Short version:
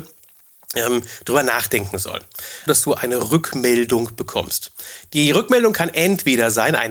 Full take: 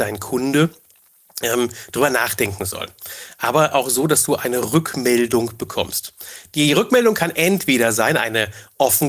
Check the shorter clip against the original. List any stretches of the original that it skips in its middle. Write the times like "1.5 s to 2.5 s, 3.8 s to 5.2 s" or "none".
3.3 s to 4.1 s